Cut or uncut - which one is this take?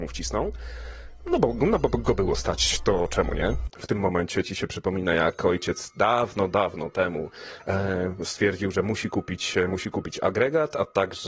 cut